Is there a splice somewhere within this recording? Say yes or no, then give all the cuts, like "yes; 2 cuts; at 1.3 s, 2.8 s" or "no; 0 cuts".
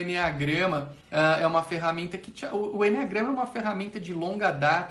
yes; 1 cut; at 1.0 s